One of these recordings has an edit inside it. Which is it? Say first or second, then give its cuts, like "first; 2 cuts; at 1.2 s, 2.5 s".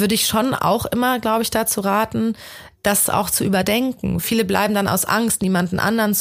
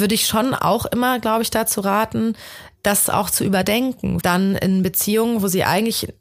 second; 1 cut; at 4.2 s